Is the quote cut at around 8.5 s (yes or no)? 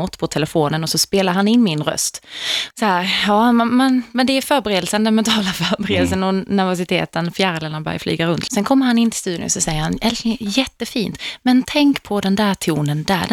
yes